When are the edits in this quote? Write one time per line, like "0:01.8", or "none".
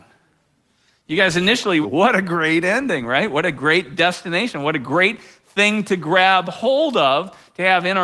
0:01.8